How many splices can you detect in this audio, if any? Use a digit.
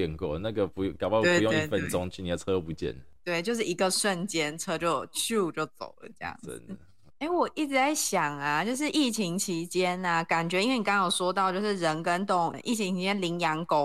2